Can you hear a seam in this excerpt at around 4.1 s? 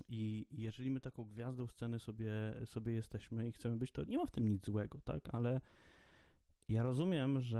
yes; 1 cut; at 4.1 s

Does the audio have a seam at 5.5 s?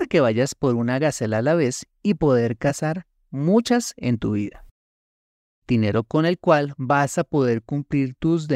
yes; 1 cut; at 5.5 s

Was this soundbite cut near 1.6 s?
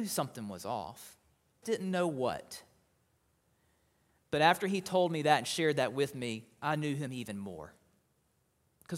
yes; 1 cut; at 1.6 s

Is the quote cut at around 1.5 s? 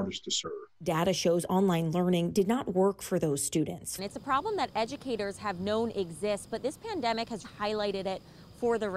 no; 2 cuts; at 4.0 s, 7.4 s

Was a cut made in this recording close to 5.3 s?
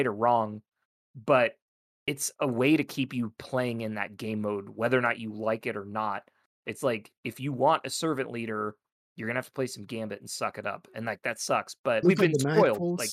no; 1 cut; at 12.0 s

